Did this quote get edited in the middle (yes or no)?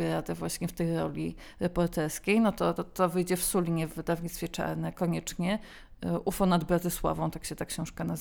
yes